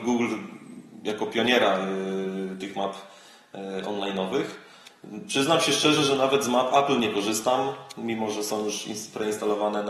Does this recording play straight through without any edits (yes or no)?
yes